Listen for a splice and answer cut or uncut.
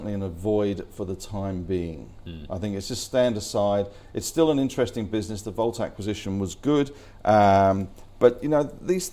uncut